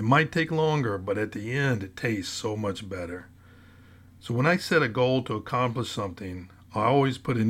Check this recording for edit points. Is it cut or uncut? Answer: uncut